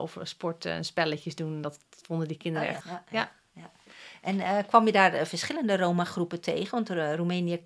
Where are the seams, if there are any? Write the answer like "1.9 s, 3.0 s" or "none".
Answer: 2.8 s